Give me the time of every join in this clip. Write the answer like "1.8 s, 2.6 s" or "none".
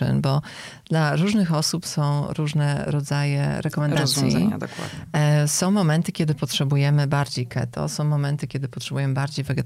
none